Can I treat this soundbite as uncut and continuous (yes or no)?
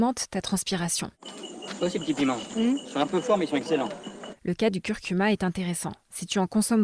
yes